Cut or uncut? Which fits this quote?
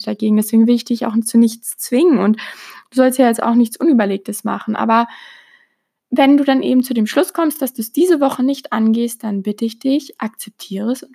uncut